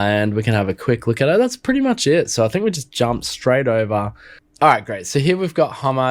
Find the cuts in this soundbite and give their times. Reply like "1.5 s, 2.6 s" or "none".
none